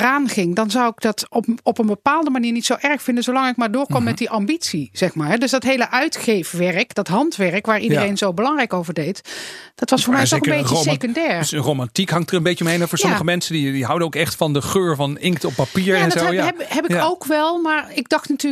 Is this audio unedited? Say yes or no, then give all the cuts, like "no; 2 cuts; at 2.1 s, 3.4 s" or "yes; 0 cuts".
yes; 0 cuts